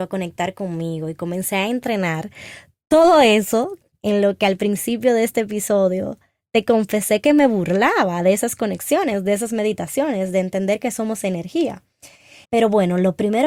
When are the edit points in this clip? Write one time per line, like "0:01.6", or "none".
0:12.4